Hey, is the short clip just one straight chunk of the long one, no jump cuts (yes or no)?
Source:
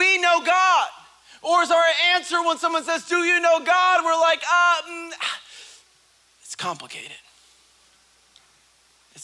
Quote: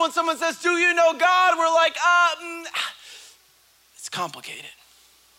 yes